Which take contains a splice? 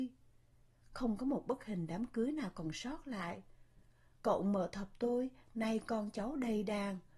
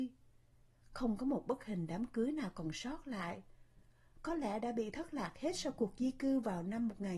first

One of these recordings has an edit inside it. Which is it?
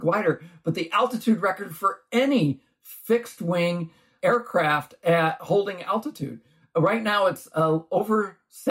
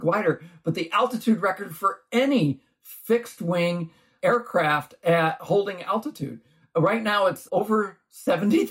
second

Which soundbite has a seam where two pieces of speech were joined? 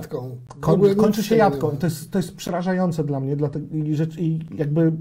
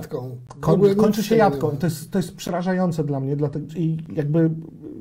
second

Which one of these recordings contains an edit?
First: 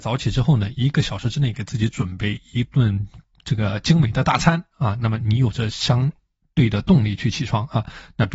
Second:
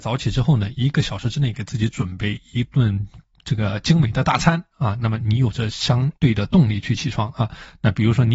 second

